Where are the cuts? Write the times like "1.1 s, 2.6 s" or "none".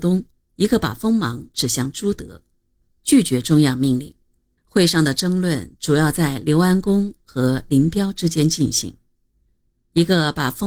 2.8 s, 4.6 s